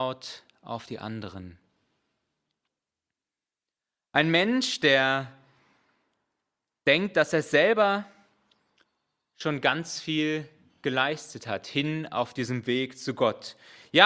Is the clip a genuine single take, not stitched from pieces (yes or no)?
yes